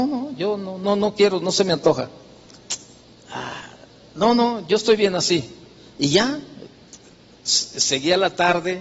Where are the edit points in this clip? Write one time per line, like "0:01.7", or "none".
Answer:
none